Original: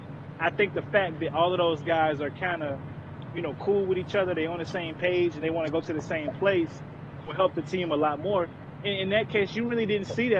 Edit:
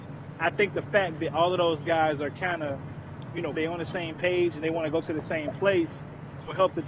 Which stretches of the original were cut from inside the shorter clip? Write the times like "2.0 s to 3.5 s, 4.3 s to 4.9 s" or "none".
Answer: 3.5 s to 4.3 s